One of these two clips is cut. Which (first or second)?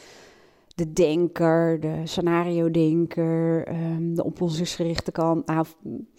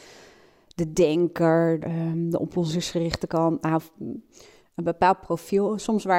second